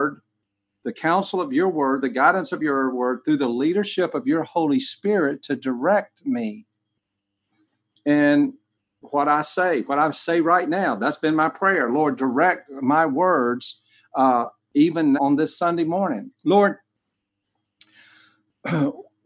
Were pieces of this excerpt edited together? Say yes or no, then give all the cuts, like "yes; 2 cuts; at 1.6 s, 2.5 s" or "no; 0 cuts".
yes; 2 cuts; at 15.1 s, 16.4 s